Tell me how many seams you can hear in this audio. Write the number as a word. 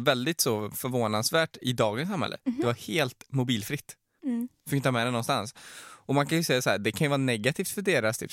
one